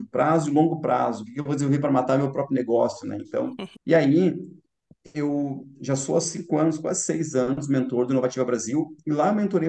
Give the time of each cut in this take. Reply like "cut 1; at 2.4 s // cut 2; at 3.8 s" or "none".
cut 1; at 3.8 s